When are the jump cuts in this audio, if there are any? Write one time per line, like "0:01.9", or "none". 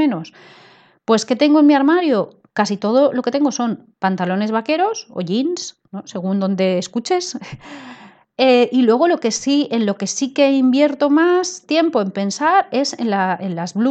none